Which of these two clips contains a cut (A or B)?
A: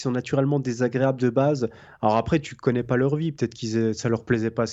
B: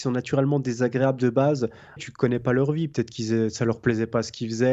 B